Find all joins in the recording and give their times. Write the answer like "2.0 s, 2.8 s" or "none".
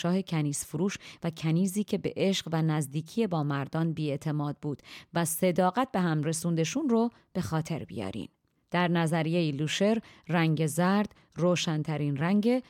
none